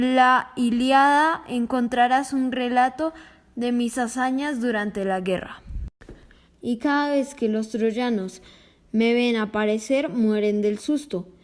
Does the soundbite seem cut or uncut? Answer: cut